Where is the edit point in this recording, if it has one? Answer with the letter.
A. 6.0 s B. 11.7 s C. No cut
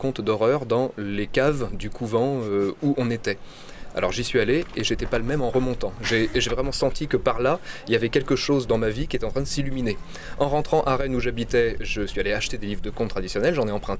C